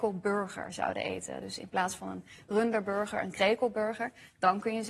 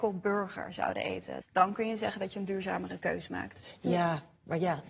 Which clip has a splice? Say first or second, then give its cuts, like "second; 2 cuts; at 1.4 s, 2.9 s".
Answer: second; 1 cut; at 1.4 s